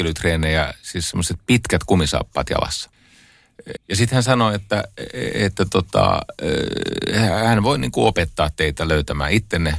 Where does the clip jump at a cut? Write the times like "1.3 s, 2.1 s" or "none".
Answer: 3.8 s